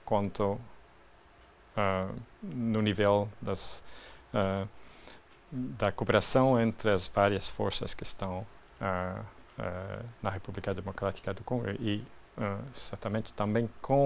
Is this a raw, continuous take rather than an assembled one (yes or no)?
no